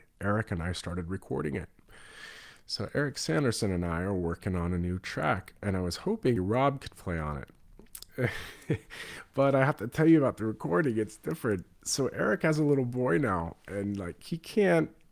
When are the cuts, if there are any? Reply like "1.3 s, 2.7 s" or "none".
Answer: 6.4 s